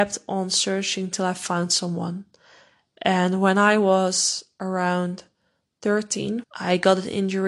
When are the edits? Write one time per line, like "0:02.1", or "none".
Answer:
0:06.4